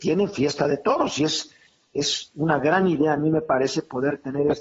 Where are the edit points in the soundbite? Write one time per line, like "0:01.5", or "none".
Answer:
none